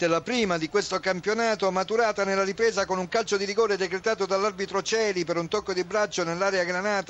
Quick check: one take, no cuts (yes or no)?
yes